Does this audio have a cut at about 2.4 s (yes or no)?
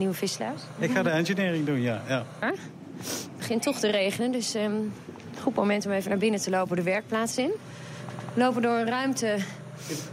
yes